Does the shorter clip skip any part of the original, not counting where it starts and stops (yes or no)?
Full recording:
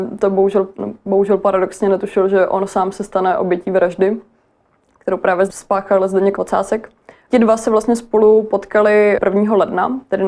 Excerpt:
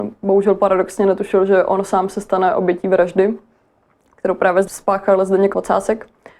no